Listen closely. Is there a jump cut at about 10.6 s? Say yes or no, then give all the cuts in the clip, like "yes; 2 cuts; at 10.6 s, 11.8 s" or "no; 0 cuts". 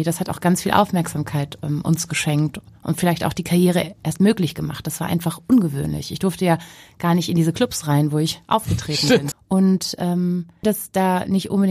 yes; 2 cuts; at 9.3 s, 10.6 s